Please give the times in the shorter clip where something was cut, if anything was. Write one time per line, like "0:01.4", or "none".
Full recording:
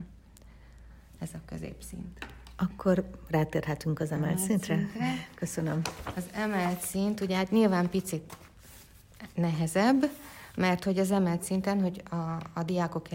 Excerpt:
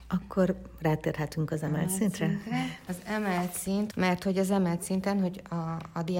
0:02.9
0:03.9